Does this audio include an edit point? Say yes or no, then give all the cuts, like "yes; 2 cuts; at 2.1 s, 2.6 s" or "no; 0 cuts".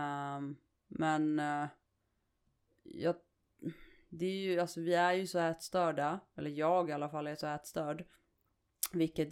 no; 0 cuts